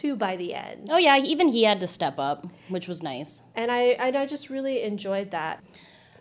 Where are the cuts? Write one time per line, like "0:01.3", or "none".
none